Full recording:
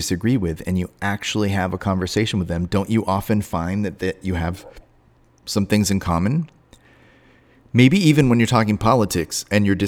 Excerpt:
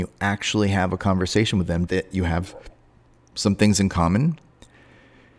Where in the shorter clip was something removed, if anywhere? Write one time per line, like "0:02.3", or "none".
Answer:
0:01.9